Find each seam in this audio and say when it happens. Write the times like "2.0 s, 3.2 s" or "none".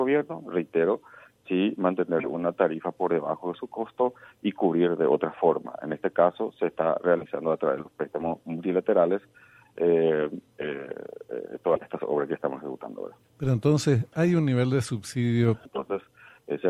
13.2 s, 15.7 s